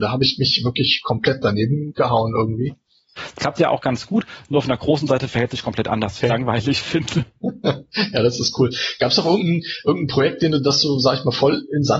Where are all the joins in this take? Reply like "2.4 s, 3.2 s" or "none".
3.2 s, 6.2 s